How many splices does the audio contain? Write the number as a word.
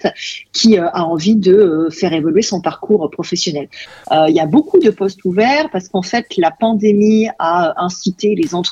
one